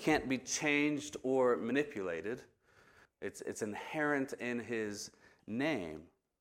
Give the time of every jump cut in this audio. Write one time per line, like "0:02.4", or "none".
0:03.1